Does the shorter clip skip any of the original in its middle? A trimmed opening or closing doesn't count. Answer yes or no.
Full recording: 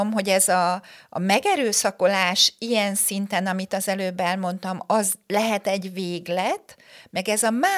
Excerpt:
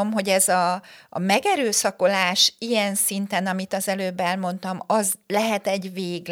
no